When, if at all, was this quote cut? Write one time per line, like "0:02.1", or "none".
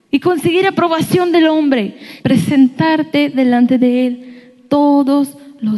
0:02.2